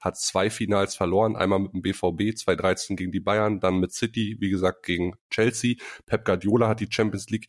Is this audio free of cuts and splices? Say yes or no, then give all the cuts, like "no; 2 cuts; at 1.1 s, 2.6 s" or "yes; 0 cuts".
yes; 0 cuts